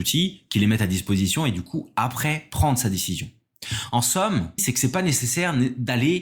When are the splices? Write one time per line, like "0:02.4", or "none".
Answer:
0:04.6